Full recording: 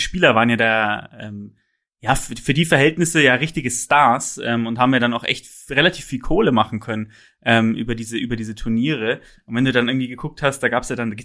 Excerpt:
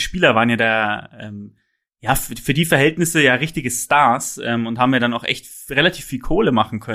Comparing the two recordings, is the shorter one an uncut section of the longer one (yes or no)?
yes